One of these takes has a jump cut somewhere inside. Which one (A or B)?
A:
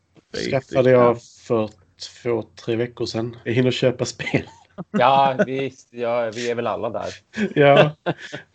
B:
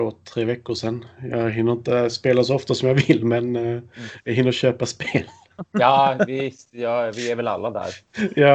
A